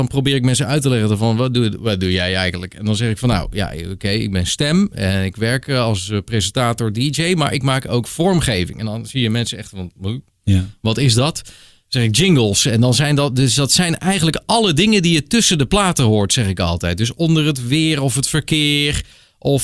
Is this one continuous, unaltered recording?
yes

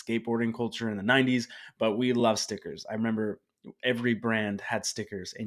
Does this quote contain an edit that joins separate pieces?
no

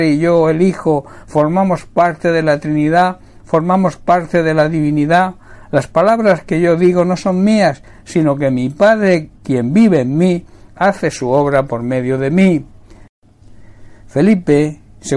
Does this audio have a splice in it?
no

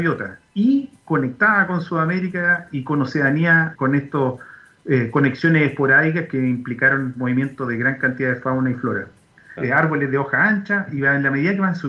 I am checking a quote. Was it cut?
yes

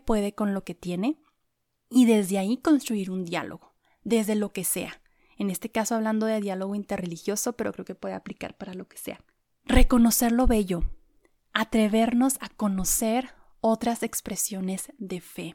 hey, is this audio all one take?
yes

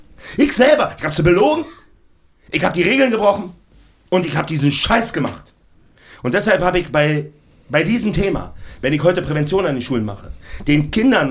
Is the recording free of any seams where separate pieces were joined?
yes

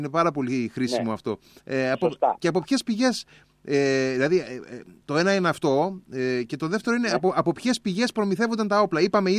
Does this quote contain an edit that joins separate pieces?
yes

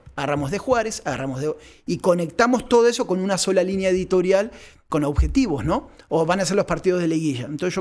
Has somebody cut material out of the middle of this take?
no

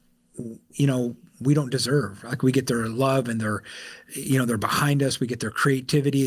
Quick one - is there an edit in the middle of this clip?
no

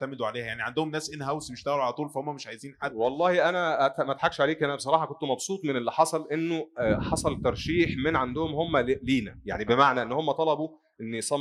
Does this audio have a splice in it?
no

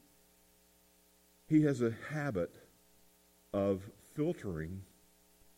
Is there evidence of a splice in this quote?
no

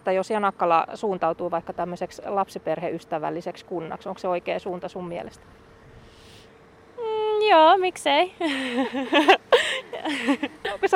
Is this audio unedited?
yes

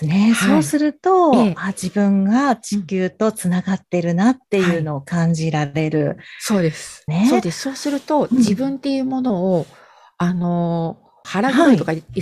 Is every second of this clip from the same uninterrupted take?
no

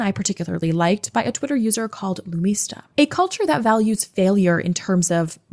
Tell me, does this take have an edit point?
no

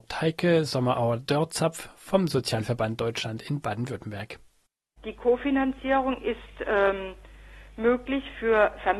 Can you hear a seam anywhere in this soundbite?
no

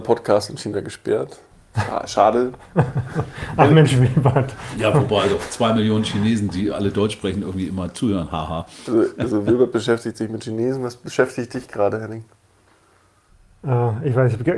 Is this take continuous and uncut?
yes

